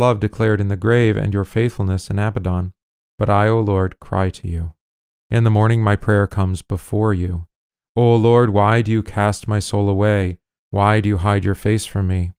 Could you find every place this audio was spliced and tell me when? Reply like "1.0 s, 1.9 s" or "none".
3.0 s